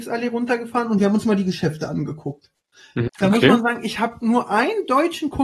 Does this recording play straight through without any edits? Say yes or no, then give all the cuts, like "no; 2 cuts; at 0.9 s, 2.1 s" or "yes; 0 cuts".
no; 1 cut; at 3.1 s